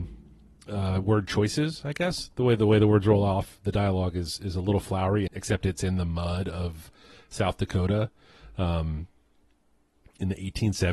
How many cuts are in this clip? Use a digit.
1